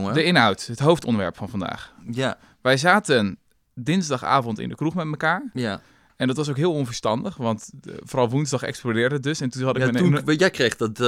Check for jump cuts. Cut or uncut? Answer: uncut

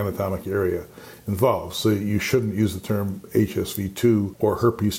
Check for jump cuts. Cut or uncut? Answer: uncut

